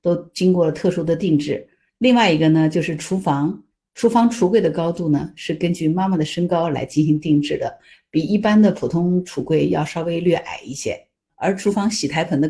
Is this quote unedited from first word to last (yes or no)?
yes